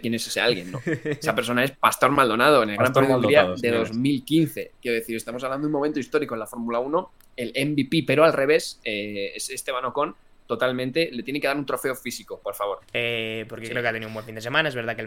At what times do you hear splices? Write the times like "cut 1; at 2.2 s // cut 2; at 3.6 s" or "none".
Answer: cut 1; at 12.8 s